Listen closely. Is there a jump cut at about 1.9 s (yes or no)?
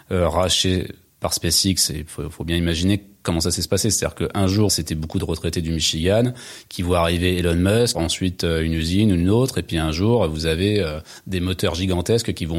no